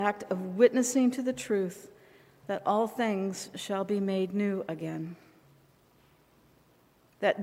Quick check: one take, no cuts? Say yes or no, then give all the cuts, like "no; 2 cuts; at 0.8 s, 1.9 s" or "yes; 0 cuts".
yes; 0 cuts